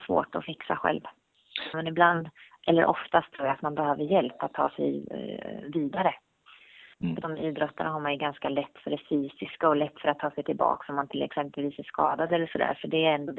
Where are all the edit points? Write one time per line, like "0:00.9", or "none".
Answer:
0:01.7
0:07.2